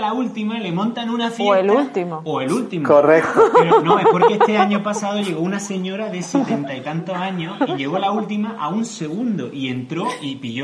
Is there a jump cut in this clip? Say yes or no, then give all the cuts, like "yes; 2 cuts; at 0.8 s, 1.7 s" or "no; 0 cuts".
no; 0 cuts